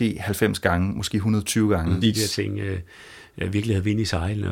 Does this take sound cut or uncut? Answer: cut